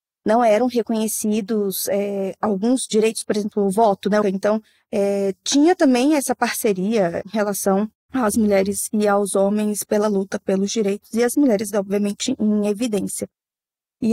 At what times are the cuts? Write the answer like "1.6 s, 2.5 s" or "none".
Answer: 4.2 s

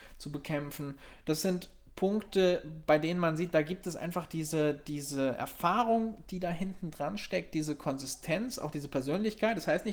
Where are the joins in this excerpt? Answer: none

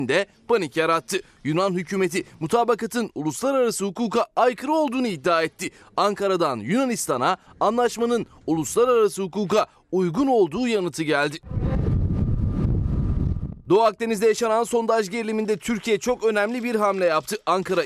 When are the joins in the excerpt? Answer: none

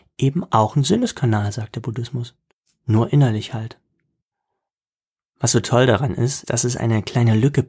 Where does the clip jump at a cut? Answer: 6.4 s

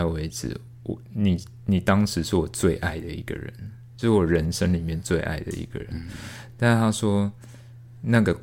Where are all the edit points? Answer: none

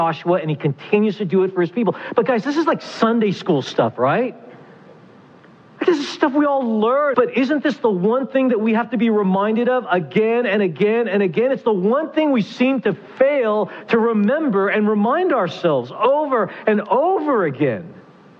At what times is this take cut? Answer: 7.1 s

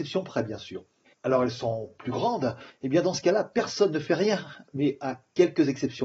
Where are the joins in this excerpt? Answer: 1.1 s, 2.7 s

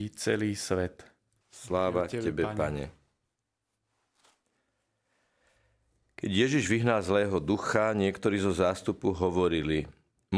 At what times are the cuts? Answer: 1.4 s

